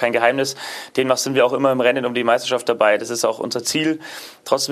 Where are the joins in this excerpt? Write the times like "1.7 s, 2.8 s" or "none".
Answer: none